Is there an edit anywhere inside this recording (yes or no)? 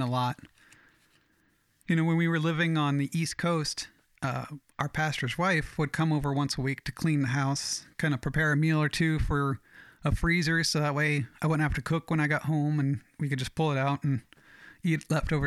no